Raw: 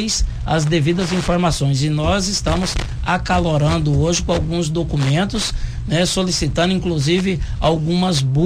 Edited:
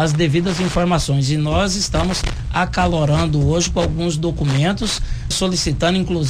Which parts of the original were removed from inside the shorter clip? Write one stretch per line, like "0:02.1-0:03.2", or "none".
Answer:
0:05.8-0:06.1

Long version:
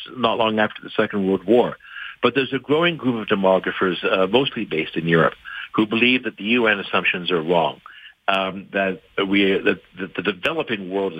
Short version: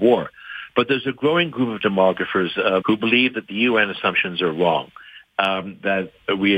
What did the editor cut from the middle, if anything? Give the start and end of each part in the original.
0:04.3-0:05.7

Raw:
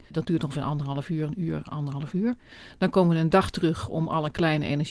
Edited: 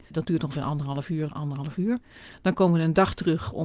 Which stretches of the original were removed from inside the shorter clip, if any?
0:01.3-0:01.6

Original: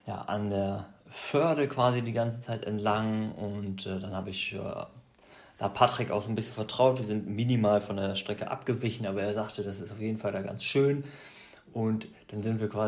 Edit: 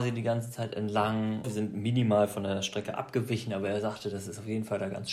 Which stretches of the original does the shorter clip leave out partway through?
0:03.3-0:07.0

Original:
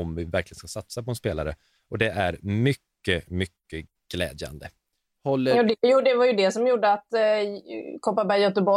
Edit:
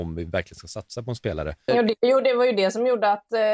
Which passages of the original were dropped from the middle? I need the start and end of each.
0:01.7-0:05.5

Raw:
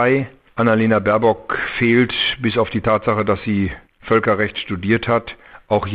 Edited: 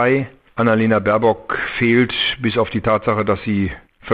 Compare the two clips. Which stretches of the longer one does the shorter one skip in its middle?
none

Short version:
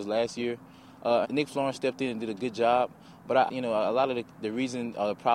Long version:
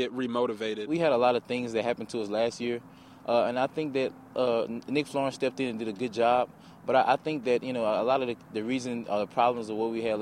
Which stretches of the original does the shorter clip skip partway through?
0:03.5-0:04.8
0:07.1-0:07.6

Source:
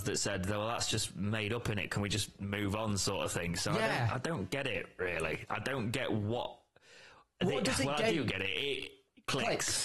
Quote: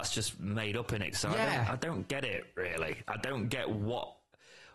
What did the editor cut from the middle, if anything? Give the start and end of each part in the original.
0:01.9-0:03.6

